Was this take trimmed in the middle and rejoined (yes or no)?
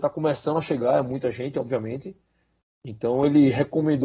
no